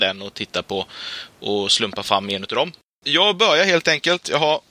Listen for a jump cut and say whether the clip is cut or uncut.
uncut